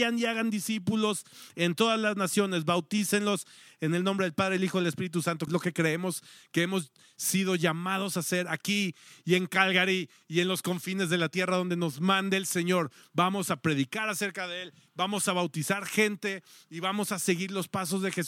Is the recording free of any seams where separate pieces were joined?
no; 1 cut; at 5.5 s

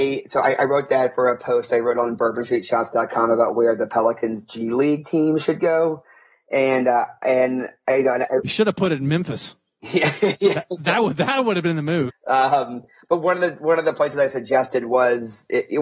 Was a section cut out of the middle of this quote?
yes; 1 cut; at 12.1 s

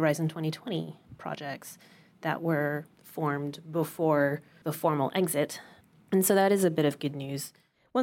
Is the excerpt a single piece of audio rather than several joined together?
yes; 0 cuts

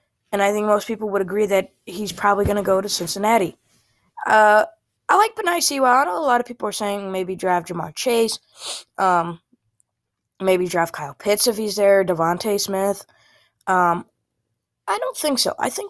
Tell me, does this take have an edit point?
no; 0 cuts

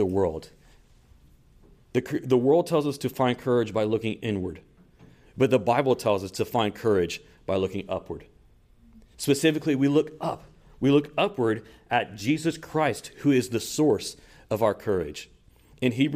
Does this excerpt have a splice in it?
yes; 1 cut; at 9.1 s

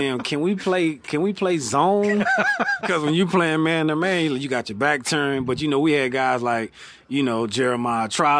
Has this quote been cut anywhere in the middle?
yes; 1 cut; at 2.8 s

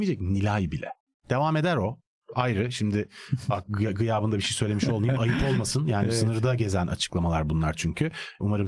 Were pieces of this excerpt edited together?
no; 0 cuts

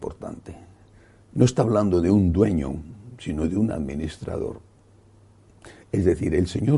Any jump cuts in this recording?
no; 0 cuts

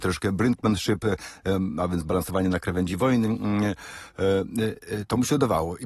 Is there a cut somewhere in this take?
no; 0 cuts

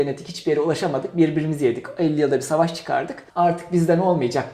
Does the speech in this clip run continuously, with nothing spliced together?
no; 1 cut; at 3.3 s

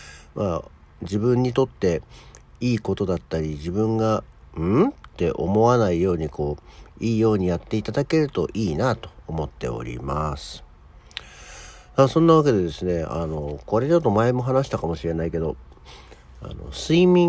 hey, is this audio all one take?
yes; 0 cuts

